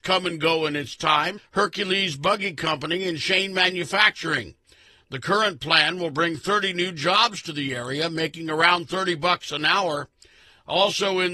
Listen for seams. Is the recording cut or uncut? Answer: cut